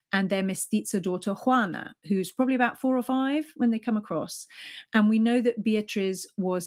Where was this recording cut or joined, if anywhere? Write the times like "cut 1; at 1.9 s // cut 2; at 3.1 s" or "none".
none